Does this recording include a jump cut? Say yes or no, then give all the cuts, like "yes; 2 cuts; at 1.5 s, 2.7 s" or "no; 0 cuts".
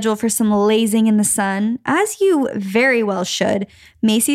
no; 0 cuts